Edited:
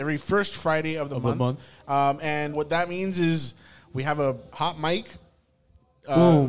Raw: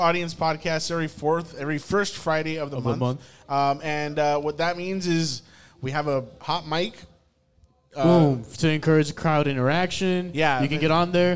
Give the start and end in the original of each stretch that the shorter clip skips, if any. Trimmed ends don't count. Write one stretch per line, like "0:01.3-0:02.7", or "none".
0:04.1-0:04.4